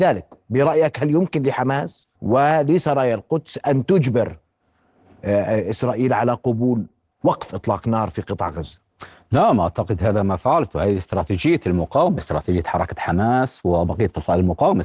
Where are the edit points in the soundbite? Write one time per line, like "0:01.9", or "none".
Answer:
0:02.2

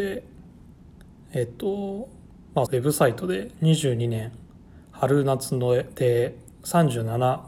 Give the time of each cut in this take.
0:02.7

